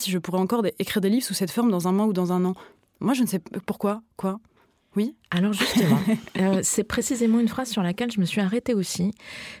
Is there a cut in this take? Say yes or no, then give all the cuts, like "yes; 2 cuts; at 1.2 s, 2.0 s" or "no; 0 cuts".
no; 0 cuts